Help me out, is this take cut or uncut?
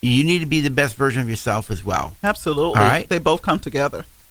uncut